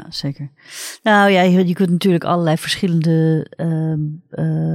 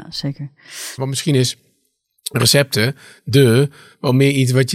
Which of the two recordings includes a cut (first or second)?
second